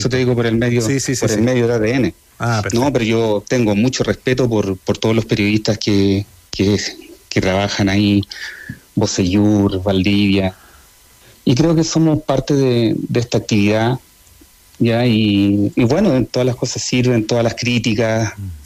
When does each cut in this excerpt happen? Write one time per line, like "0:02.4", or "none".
0:16.3